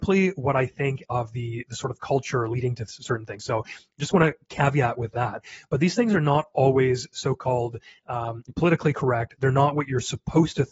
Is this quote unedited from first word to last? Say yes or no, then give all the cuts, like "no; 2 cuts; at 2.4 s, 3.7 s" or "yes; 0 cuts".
yes; 0 cuts